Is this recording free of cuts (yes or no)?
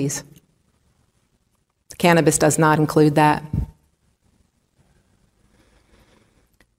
yes